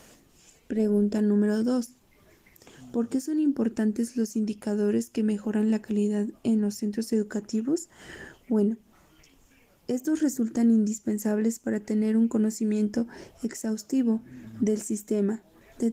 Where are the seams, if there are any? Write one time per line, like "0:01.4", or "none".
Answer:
none